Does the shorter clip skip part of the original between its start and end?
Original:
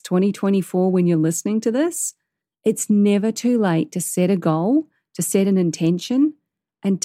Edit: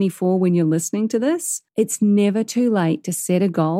yes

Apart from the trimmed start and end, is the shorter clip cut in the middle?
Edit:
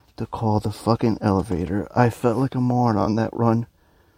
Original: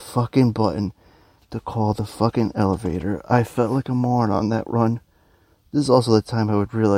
no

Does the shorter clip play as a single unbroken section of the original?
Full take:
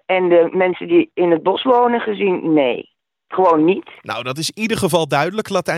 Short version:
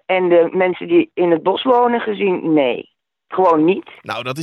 yes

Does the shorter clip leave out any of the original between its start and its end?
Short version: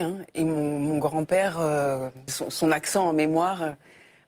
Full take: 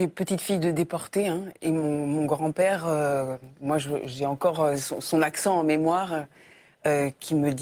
yes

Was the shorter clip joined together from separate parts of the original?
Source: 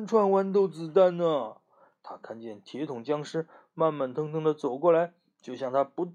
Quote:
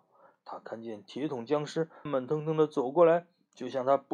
yes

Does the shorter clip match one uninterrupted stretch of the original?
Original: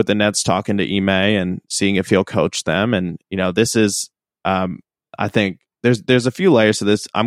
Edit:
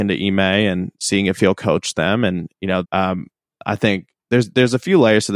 no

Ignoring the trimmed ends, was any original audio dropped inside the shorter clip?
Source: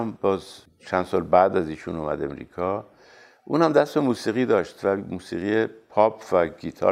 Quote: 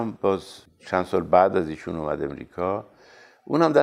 no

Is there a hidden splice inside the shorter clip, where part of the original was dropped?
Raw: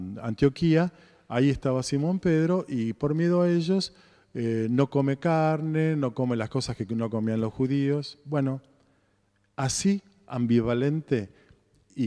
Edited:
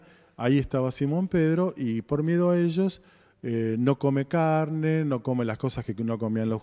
no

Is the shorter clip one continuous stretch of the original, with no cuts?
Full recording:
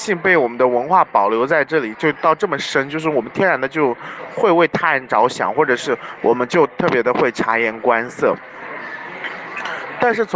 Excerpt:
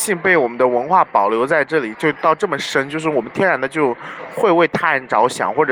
yes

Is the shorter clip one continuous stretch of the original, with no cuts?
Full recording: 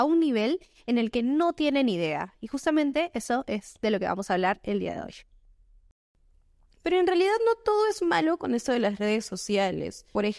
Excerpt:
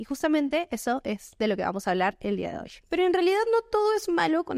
no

